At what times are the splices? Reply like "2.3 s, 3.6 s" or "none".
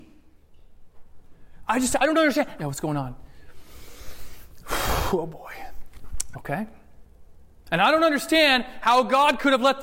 2.6 s, 6.3 s